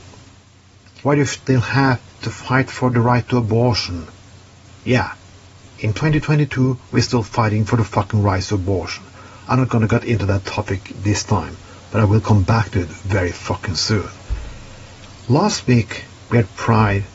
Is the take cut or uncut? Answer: cut